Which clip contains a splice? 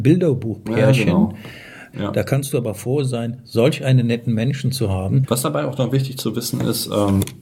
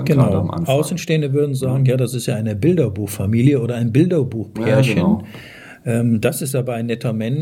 first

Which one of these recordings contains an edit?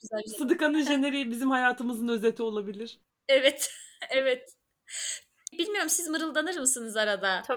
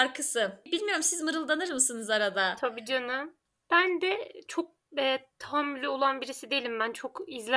first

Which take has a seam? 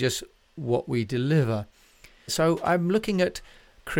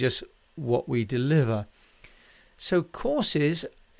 first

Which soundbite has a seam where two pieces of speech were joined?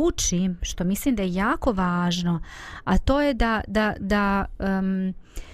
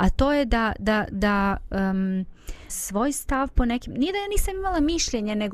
second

